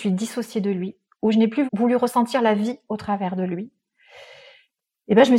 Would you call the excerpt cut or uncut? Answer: cut